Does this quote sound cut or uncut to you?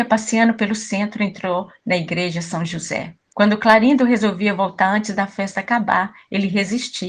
cut